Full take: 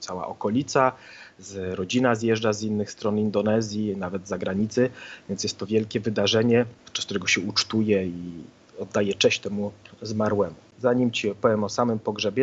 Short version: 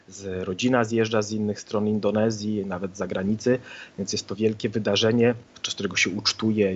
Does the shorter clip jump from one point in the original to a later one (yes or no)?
no